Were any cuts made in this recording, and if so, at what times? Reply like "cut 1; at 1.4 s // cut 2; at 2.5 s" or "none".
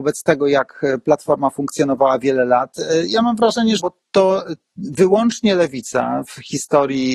cut 1; at 3.8 s